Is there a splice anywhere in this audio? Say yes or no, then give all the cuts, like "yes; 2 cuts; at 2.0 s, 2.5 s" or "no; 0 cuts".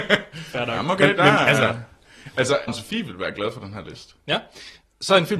yes; 1 cut; at 2.7 s